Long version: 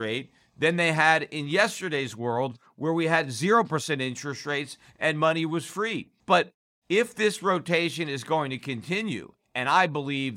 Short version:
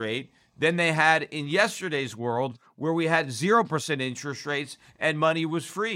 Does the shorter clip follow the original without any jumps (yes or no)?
yes